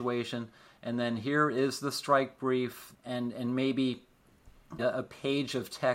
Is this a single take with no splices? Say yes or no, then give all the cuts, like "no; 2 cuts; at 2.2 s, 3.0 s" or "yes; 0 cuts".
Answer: no; 2 cuts; at 2.9 s, 4.8 s